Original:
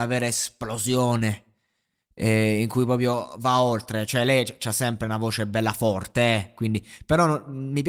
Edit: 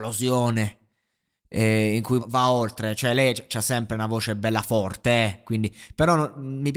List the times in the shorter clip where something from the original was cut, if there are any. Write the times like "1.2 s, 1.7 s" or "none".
2.2 s